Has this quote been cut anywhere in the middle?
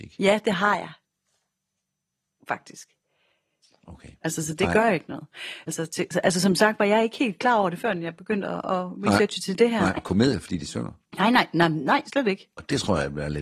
yes; 3 cuts; at 4.2 s, 5.7 s, 10.0 s

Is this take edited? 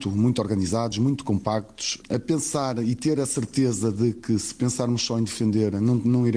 no; 0 cuts

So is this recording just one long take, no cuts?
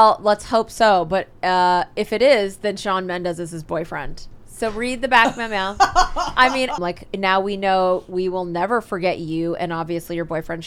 no; 2 cuts; at 1.4 s, 6.8 s

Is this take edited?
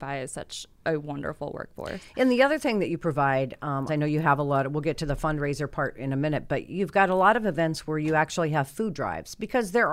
yes; 1 cut; at 3.9 s

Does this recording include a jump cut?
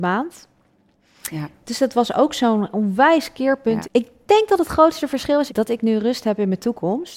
yes; 2 cuts; at 3.8 s, 5.5 s

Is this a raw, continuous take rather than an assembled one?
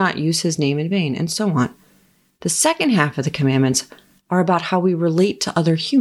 yes; 0 cuts

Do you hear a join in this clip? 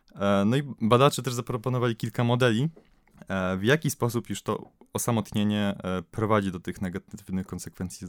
no; 0 cuts

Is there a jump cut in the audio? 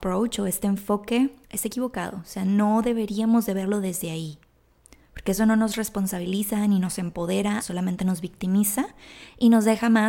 yes; 2 cuts; at 1.4 s, 7.6 s

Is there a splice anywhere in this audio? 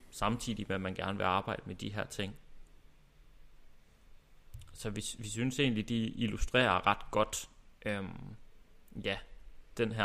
no; 0 cuts

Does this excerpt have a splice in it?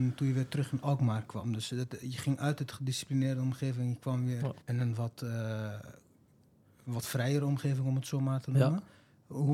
yes; 1 cut; at 4.6 s

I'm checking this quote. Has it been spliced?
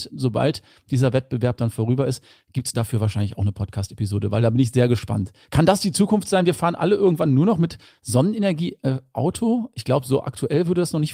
no; 0 cuts

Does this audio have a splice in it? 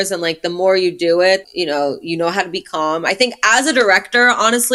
yes; 1 cut; at 1.4 s

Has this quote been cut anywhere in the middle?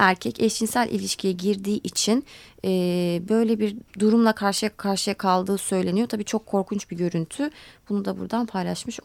yes; 1 cut; at 3.9 s

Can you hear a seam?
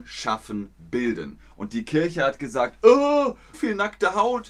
yes; 1 cut; at 3.5 s

